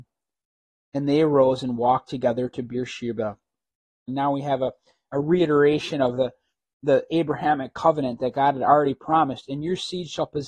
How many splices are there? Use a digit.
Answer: 1